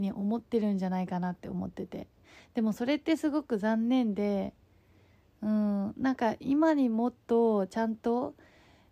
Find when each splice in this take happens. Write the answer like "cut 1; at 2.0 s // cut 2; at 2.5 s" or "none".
none